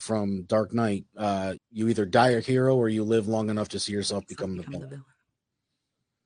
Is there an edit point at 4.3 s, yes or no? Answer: no